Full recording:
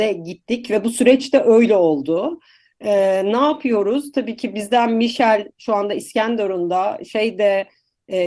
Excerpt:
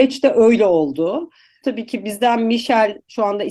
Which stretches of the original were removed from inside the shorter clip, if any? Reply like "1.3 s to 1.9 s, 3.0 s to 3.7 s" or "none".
2.7 s to 4.1 s